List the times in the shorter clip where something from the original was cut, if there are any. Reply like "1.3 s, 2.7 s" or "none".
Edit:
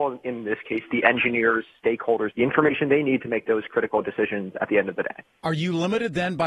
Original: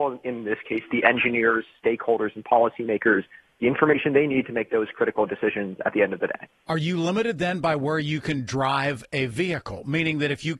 2.3 s

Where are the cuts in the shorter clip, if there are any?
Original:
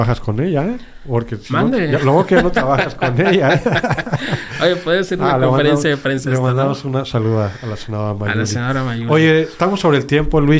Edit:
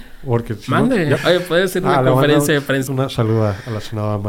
1.2 s, 2.9 s

